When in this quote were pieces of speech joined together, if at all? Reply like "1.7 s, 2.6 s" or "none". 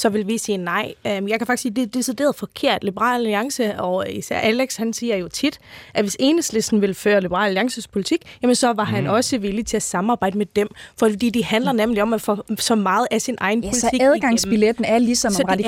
none